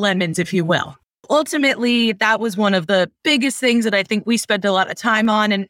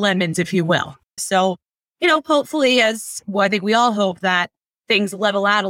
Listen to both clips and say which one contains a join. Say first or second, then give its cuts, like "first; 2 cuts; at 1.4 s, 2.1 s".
second; 1 cut; at 1.2 s